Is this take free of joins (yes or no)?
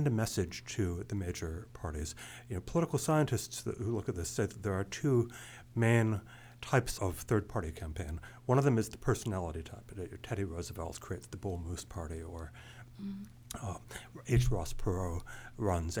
no